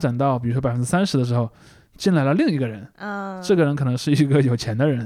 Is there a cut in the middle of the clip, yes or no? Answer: no